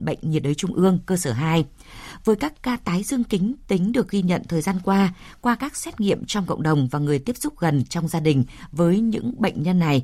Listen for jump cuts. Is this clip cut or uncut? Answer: uncut